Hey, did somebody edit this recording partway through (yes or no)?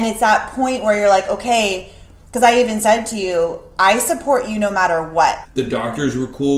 yes